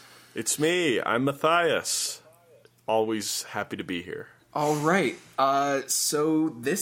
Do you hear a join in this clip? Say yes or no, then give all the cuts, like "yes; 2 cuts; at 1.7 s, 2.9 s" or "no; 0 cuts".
no; 0 cuts